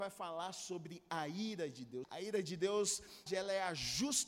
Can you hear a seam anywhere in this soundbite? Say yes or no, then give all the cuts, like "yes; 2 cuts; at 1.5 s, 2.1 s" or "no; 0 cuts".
yes; 2 cuts; at 2.0 s, 3.3 s